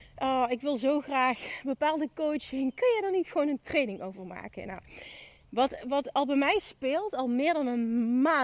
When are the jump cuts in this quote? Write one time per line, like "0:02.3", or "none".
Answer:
none